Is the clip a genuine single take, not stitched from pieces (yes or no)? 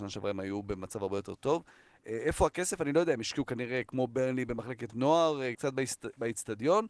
no